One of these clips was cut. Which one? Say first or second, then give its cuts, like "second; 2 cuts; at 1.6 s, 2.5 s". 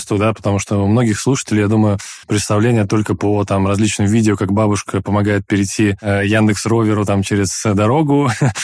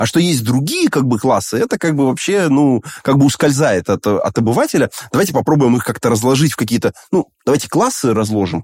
first; 1 cut; at 2.2 s